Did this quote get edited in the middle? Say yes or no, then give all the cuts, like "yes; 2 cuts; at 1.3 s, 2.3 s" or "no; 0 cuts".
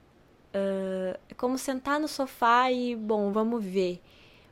no; 0 cuts